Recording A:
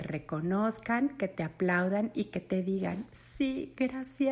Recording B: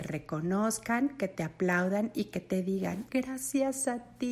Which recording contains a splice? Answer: B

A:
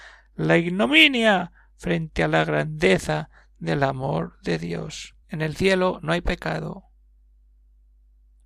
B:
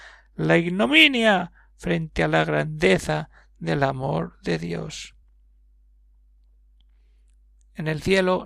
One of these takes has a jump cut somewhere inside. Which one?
A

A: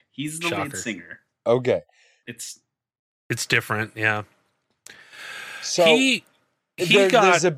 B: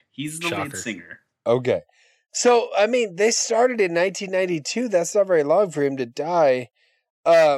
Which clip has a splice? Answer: A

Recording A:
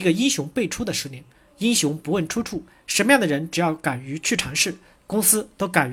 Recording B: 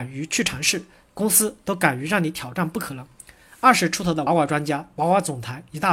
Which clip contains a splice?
B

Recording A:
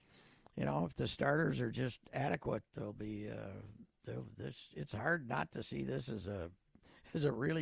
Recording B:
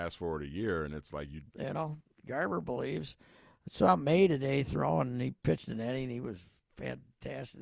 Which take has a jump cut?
B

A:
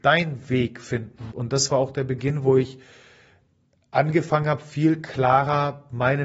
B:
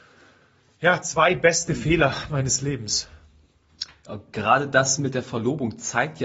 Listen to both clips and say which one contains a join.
A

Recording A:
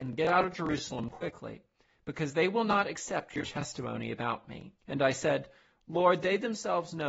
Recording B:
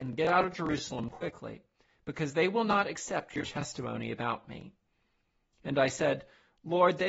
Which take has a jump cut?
A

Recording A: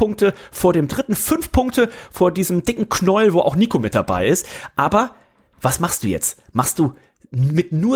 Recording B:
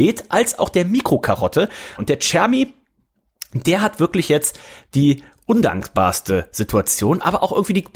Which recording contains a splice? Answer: B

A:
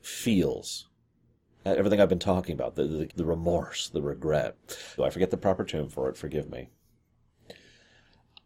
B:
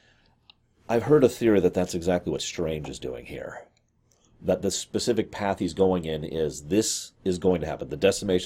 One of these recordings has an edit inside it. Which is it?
A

